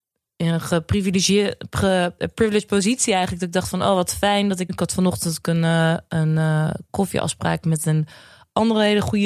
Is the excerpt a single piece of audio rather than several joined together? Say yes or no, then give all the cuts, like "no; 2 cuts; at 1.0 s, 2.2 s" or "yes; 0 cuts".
no; 1 cut; at 4.7 s